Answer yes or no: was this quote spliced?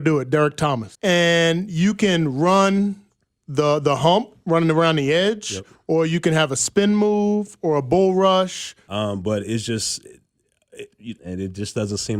yes